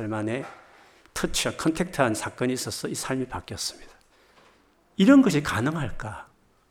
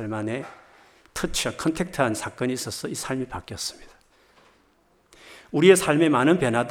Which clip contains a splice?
first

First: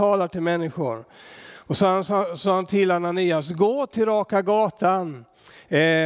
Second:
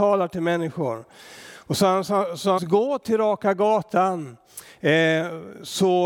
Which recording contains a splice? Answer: second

